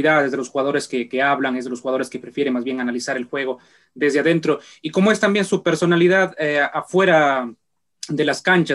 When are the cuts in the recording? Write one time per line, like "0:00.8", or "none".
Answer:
none